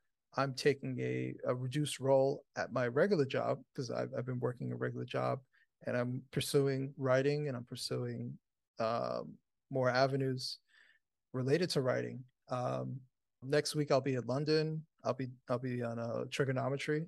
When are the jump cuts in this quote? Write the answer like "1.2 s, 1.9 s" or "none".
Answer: 13.4 s